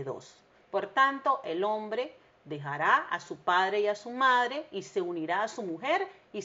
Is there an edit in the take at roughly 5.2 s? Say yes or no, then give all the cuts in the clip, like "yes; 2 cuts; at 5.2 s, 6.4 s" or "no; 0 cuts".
no; 0 cuts